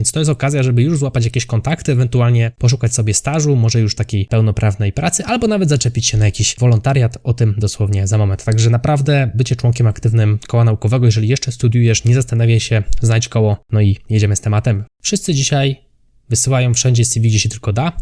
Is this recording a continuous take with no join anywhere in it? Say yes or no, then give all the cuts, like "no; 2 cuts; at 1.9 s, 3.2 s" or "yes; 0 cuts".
no; 1 cut; at 14.9 s